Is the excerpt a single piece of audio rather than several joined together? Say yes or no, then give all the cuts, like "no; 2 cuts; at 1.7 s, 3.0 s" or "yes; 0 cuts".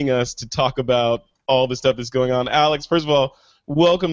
yes; 0 cuts